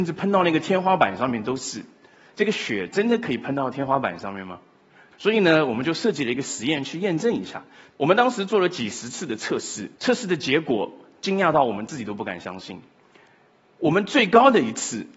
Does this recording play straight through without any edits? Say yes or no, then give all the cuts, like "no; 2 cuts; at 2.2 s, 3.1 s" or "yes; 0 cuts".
no; 1 cut; at 10.0 s